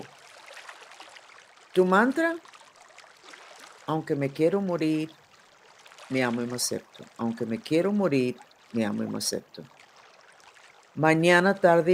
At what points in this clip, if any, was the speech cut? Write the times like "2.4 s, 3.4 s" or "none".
none